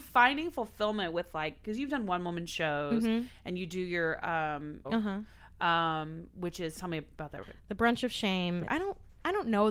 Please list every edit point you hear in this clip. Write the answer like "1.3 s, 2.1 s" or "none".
4.8 s, 7.4 s, 8.7 s